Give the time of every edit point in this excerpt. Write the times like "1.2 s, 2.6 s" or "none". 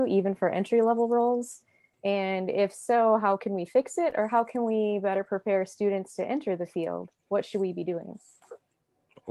1.9 s, 7.2 s